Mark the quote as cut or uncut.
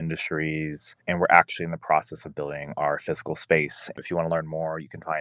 cut